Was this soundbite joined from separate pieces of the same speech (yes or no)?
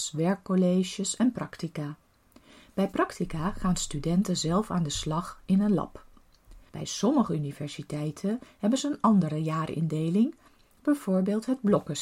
yes